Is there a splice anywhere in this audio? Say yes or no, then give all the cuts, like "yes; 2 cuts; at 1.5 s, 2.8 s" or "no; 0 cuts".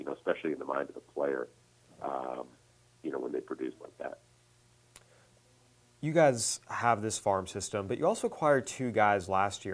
no; 0 cuts